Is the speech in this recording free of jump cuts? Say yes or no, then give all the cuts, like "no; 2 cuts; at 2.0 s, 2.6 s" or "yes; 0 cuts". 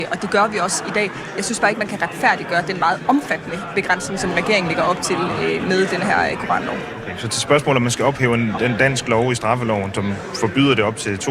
no; 1 cut; at 8.6 s